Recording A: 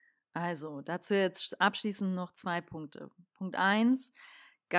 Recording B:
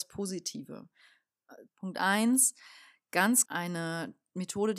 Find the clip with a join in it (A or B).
B